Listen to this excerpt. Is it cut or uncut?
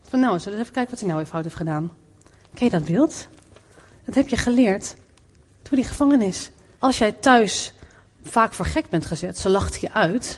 cut